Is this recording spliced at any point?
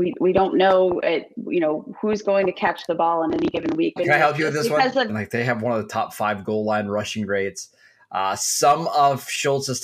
yes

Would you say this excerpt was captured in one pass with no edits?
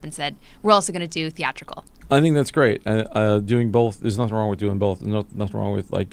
yes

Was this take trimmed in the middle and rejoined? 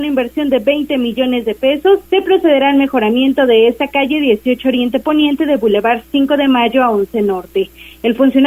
yes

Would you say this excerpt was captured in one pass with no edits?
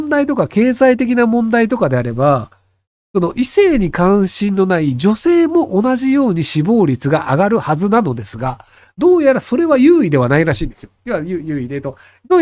yes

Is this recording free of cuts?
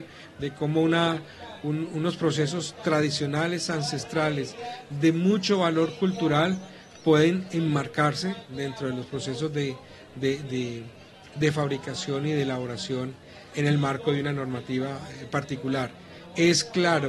no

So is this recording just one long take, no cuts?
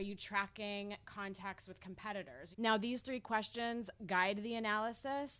no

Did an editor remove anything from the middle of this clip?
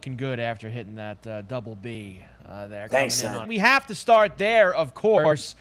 yes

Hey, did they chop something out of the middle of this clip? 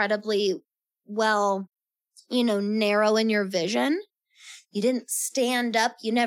no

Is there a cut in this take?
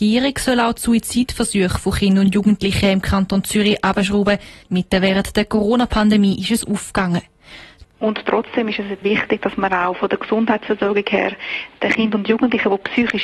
yes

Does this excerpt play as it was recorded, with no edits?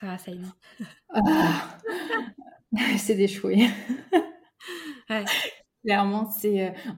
yes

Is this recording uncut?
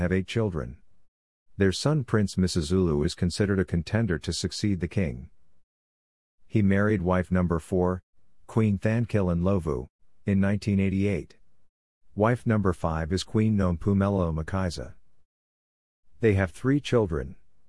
no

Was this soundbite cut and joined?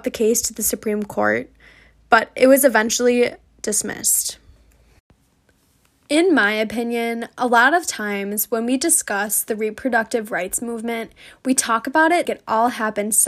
yes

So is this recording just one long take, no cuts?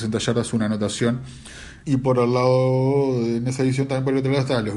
no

